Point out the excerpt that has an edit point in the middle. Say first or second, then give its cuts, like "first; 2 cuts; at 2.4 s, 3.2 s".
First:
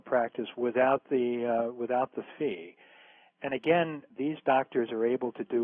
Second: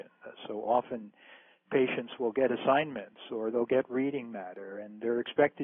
first; 1 cut; at 4.1 s